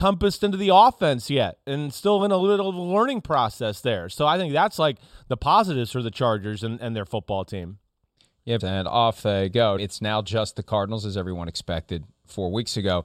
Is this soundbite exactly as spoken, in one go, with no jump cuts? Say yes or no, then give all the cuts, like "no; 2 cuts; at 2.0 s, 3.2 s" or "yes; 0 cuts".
no; 2 cuts; at 8.6 s, 9.8 s